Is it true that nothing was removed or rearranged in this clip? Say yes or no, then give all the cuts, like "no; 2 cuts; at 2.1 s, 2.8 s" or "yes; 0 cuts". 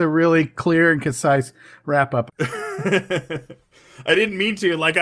no; 1 cut; at 2.3 s